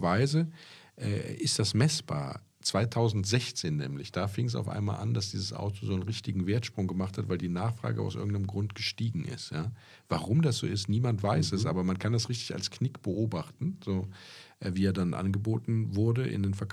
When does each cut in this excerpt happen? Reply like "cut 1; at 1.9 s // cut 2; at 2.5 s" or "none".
none